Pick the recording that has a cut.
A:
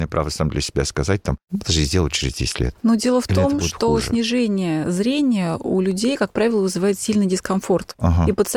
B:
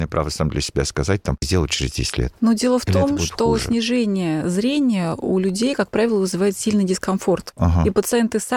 B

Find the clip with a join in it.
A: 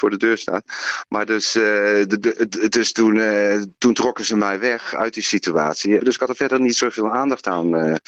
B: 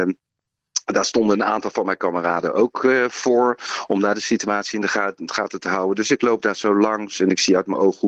A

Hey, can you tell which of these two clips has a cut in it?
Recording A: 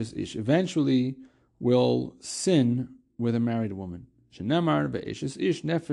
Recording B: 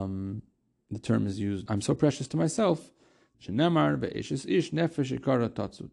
B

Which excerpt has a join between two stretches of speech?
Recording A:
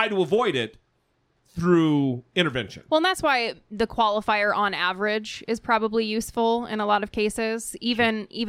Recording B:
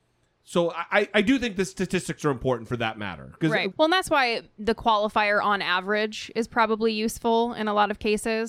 B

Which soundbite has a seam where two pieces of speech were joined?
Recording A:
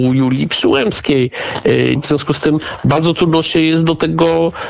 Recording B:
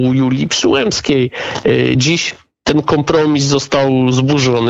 A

